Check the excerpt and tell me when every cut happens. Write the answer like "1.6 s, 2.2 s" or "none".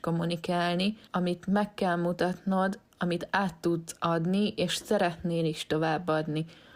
none